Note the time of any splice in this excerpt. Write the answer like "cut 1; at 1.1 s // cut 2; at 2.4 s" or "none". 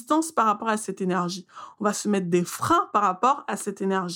none